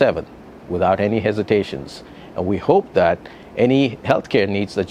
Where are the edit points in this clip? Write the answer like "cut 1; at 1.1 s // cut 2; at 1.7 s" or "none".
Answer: none